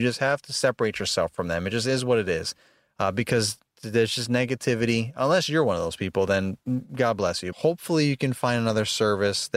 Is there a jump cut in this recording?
yes; 1 cut; at 7.5 s

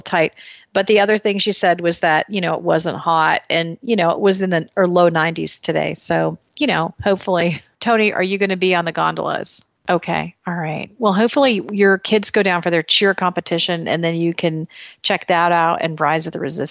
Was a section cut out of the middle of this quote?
yes; 1 cut; at 9.8 s

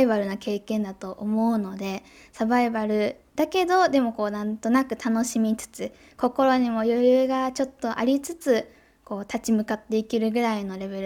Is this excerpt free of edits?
yes; 0 cuts

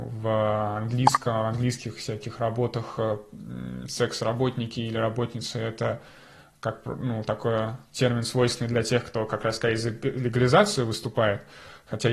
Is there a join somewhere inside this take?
no; 0 cuts

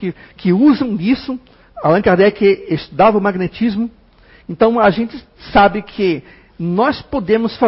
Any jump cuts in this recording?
yes; 1 cut; at 1.7 s

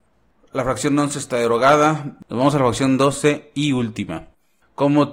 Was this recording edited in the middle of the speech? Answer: no; 0 cuts

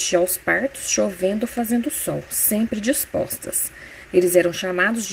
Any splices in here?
yes; 1 cut; at 4.1 s

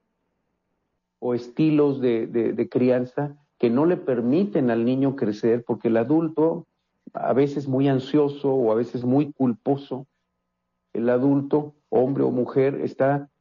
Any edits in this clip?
no; 0 cuts

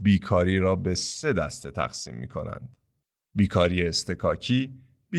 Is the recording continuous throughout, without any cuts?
yes; 0 cuts

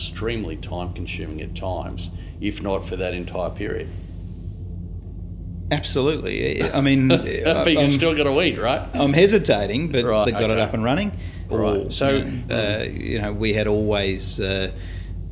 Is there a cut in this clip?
yes; 3 cuts; at 10.2 s, 11.5 s, 12.5 s

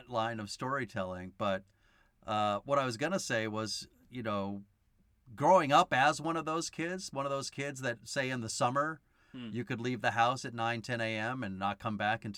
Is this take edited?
no; 0 cuts

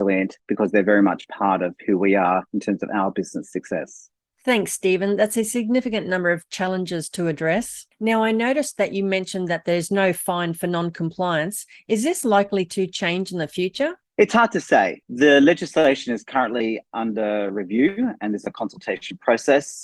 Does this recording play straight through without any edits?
yes; 0 cuts

